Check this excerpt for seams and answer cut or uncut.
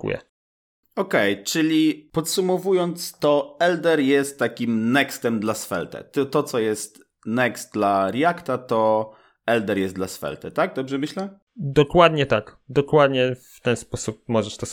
uncut